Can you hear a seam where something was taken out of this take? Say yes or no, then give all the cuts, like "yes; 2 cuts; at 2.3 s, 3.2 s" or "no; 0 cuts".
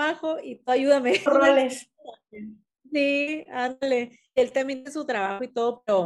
yes; 1 cut; at 1.3 s